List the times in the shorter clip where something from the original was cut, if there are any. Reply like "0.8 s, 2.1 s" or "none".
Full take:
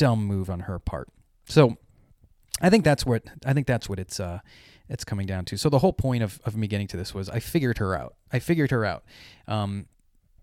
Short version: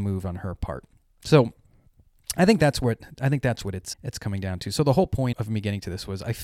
3.9 s, 5.3 s